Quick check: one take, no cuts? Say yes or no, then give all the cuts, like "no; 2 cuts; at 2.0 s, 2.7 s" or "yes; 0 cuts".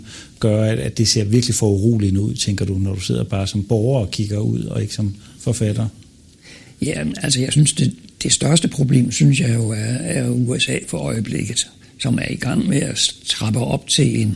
yes; 0 cuts